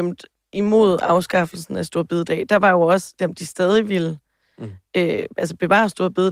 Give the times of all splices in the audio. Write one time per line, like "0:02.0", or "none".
0:03.2